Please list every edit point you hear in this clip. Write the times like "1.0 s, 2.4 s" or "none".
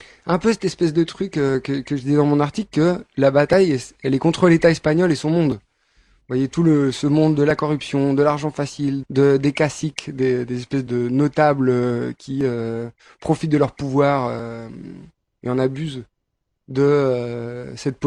9.0 s, 10.9 s